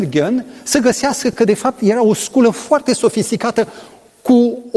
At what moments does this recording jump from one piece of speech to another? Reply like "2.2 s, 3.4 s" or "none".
none